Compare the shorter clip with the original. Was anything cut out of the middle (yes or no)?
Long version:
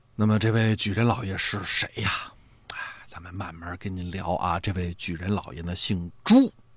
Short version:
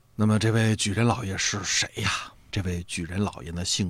yes